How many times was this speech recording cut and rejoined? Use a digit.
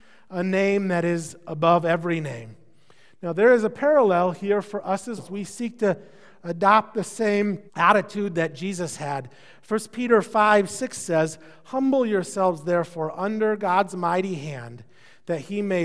2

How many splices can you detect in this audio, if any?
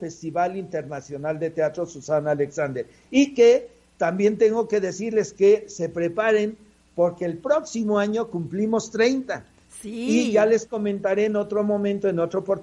0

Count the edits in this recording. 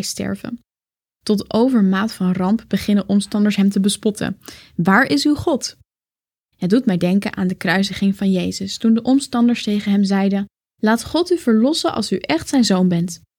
0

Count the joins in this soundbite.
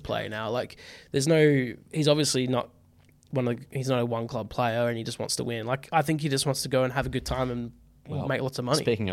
0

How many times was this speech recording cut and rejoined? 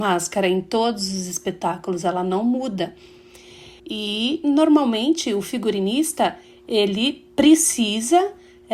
1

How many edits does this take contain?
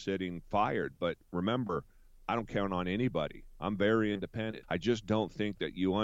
1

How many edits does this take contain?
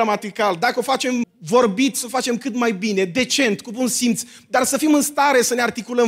1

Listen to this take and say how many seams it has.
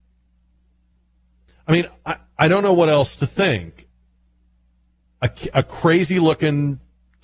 0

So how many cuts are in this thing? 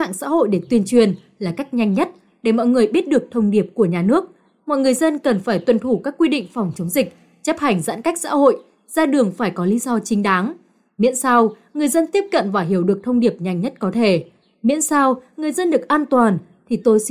0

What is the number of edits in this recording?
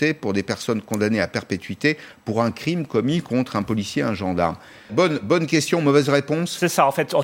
1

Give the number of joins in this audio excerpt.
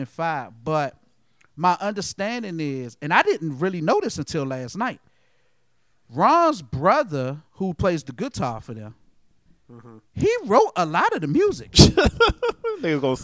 2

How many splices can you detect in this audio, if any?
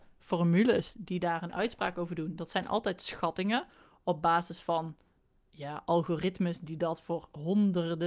0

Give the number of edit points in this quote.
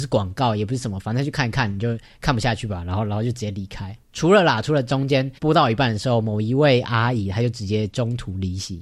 2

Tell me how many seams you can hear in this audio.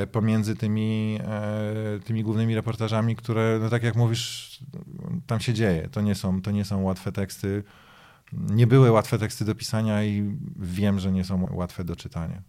1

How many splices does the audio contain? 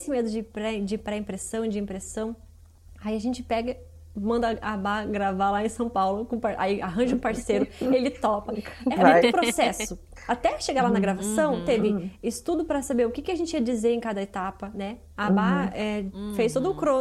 1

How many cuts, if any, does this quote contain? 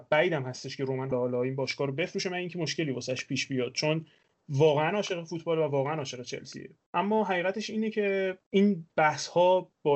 1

